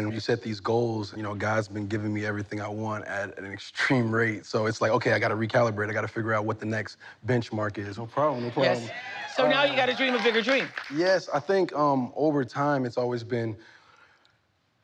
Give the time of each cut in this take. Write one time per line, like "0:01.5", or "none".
0:01.2
0:08.0